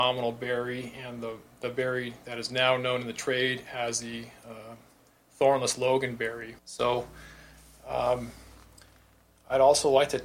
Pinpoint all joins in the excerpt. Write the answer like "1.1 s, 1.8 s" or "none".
6.6 s